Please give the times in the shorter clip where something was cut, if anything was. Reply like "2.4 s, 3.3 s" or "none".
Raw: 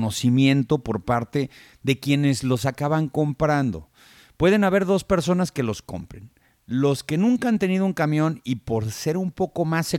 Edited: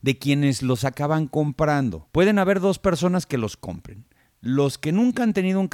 2.1 s

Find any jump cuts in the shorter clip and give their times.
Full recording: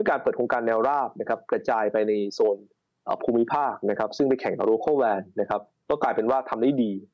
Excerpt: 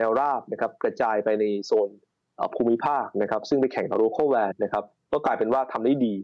4.5 s

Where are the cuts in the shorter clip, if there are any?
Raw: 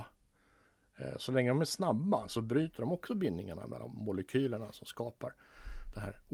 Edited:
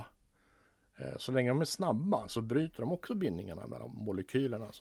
none

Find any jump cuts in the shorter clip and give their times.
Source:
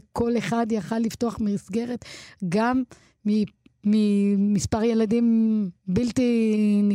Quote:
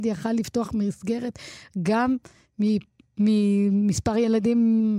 none

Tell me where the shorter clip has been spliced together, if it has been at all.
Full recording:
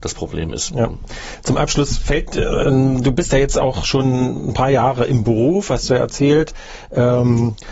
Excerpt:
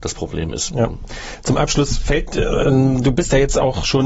none

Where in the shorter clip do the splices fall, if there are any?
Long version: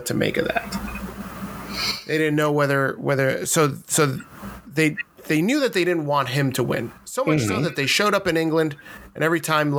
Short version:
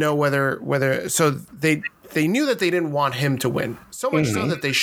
1.5 s

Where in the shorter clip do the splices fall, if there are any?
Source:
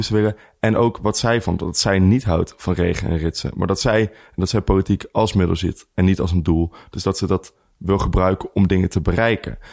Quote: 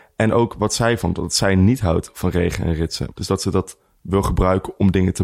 3.1 s

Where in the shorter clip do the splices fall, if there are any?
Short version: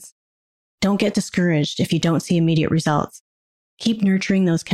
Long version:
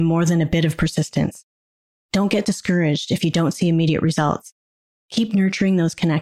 none

